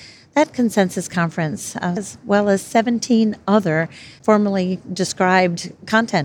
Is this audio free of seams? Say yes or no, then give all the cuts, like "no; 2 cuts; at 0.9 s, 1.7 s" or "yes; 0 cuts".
no; 1 cut; at 2.0 s